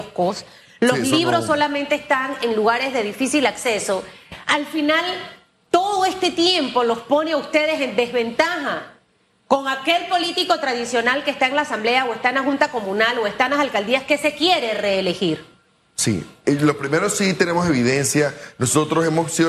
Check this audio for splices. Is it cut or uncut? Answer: uncut